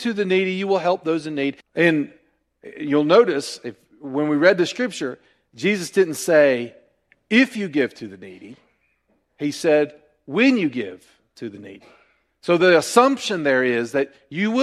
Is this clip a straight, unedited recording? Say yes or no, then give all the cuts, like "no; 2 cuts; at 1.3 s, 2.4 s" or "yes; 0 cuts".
no; 1 cut; at 1.6 s